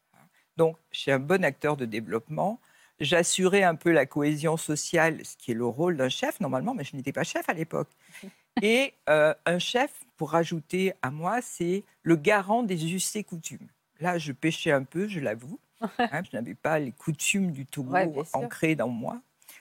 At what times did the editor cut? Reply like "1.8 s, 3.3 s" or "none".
16.2 s